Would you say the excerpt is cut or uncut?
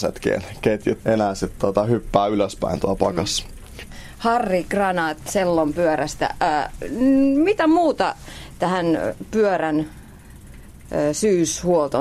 cut